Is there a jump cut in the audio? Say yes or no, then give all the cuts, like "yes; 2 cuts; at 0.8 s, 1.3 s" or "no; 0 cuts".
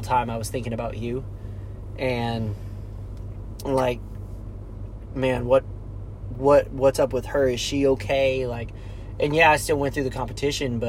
no; 0 cuts